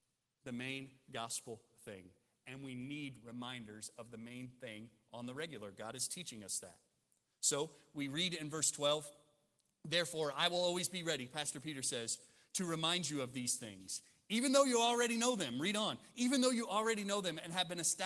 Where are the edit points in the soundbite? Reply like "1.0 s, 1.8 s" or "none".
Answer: none